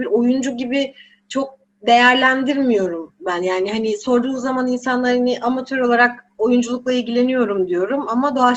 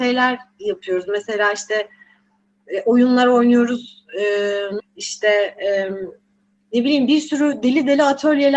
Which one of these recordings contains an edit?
second; 1 cut; at 4.8 s

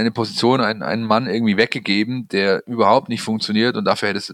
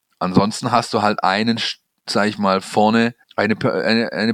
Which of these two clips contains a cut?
second; 1 cut; at 3.2 s

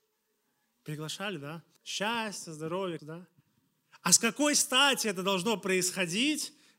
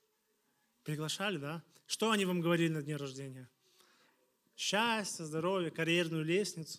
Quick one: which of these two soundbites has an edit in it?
first; 2 cuts; at 1.8 s, 3.0 s

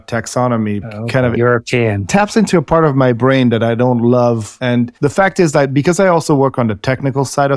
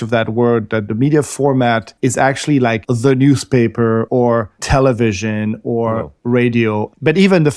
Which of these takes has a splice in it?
first; 1 cut; at 1.4 s

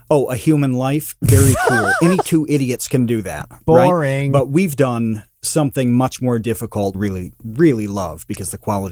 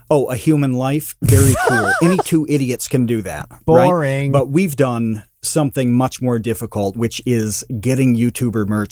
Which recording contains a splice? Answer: first; 1 cut; at 6.9 s

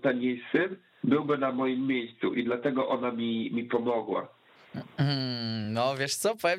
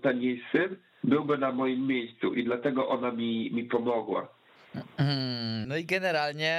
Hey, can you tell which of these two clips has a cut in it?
second; 1 cut; at 5.6 s

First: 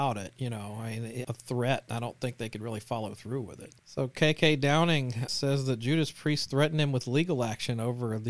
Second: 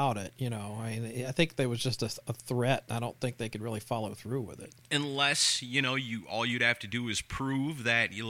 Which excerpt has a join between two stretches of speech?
first; 3 cuts; at 1.2 s, 3.8 s, 5.3 s

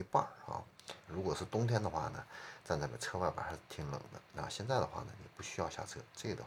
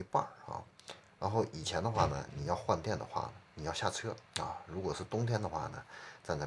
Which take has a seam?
first; 1 cut; at 1.1 s

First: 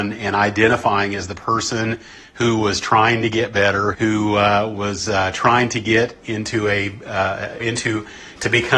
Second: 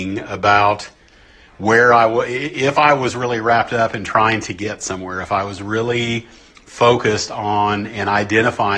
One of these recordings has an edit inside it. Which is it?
first; 2 cuts; at 3.9 s, 7.6 s

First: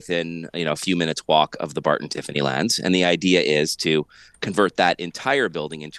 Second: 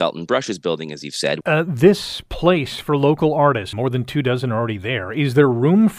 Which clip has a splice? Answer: second; 2 cuts; at 1.4 s, 3.7 s

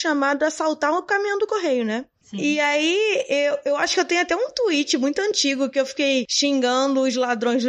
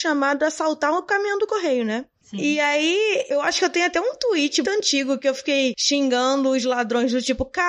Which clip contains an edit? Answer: second; 2 cuts; at 3.3 s, 4.6 s

